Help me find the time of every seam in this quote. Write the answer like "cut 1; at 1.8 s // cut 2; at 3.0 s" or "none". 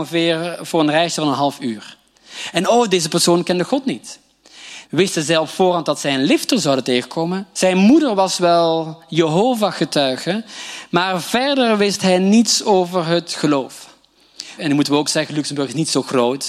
cut 1; at 4.8 s // cut 2; at 7.5 s // cut 3; at 14.6 s